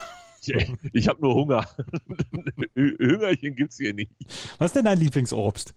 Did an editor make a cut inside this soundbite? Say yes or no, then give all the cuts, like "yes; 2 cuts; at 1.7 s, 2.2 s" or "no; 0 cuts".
no; 0 cuts